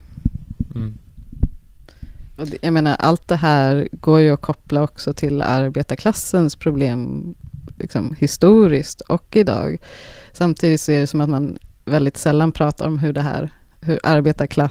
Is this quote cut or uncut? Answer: uncut